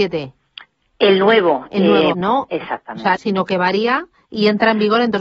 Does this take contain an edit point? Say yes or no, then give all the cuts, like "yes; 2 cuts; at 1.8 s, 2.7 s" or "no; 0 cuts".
yes; 2 cuts; at 2.1 s, 3.2 s